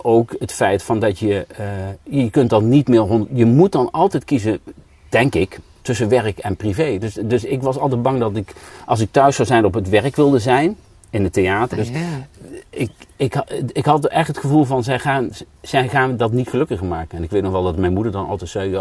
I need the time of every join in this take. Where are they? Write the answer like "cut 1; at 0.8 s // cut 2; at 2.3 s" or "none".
cut 1; at 5.8 s // cut 2; at 11.7 s